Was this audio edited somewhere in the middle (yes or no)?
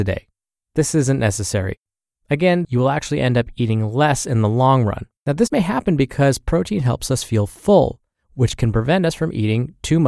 yes